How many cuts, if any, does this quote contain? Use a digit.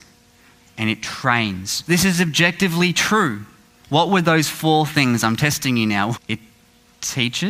3